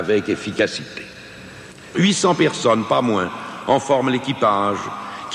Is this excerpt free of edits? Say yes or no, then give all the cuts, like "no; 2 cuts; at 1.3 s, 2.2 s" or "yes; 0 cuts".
no; 1 cut; at 1.9 s